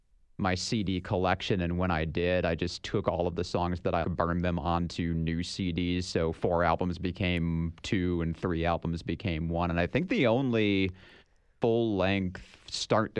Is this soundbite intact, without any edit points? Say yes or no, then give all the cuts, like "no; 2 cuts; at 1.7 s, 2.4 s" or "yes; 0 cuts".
no; 1 cut; at 4.0 s